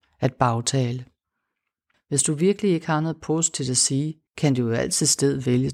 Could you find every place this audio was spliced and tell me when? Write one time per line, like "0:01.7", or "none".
0:01.9
0:04.3